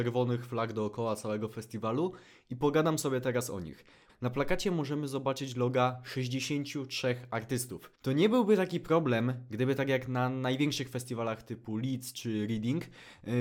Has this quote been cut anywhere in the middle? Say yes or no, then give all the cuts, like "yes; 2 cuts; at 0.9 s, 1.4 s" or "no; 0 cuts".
yes; 2 cuts; at 4.1 s, 7.9 s